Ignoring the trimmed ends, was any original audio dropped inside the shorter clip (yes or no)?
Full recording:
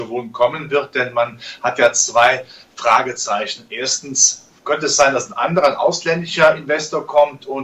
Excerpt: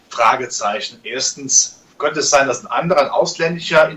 no